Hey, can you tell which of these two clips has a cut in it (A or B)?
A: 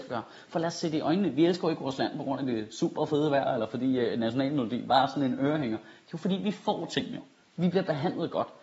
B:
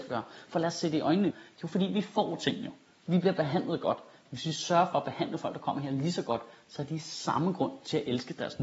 B